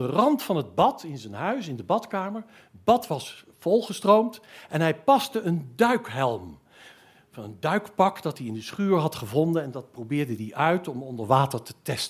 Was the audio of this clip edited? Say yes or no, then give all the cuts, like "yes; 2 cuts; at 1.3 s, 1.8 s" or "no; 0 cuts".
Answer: no; 0 cuts